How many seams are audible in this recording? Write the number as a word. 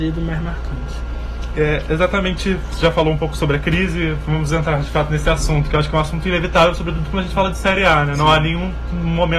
one